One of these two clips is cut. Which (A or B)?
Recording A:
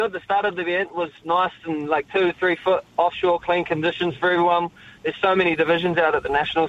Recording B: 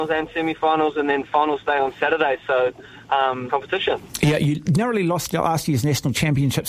B